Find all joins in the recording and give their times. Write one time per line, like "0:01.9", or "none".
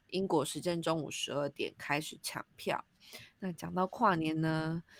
0:03.4